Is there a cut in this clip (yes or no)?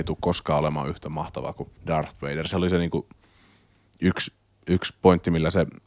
yes